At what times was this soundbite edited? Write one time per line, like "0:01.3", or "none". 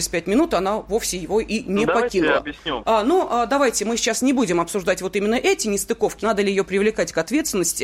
0:02.8
0:06.2